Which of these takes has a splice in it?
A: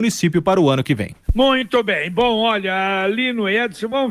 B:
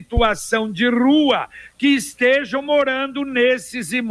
A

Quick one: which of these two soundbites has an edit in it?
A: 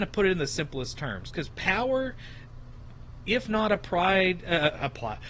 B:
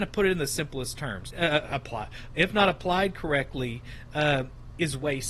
B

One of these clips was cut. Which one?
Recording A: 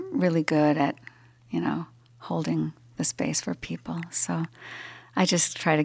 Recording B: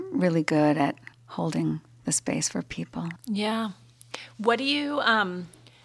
B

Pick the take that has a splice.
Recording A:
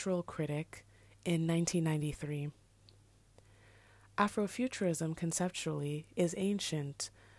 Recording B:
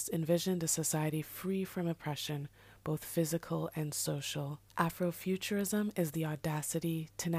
B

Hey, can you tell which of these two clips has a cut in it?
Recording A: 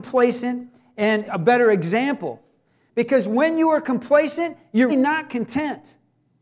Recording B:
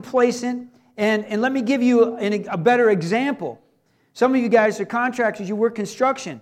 A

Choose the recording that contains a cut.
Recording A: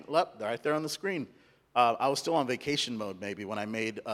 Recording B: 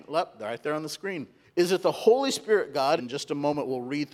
B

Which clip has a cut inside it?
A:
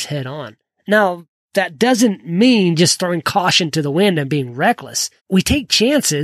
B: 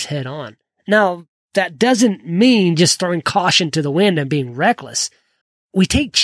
A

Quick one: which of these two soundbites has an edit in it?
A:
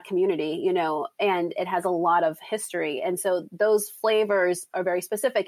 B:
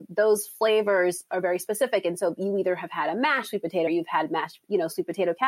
B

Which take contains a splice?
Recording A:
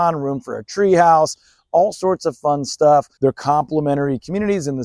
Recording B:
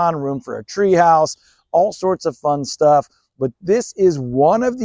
A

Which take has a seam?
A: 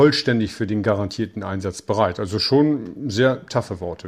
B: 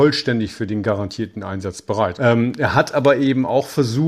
B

